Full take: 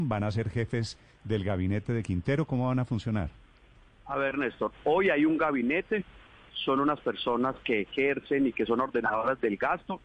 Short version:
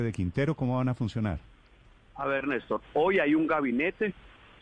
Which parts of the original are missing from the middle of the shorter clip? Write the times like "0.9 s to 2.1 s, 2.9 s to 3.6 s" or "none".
none